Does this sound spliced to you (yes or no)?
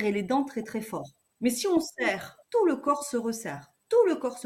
yes